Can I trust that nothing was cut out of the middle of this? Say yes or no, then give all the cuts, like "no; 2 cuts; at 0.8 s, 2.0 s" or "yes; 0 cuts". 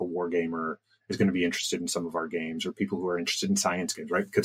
yes; 0 cuts